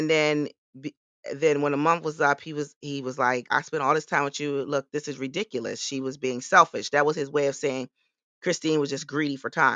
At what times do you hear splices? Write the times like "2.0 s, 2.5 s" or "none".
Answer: 3.5 s